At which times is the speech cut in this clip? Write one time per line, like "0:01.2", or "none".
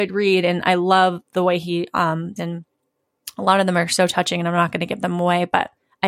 0:02.4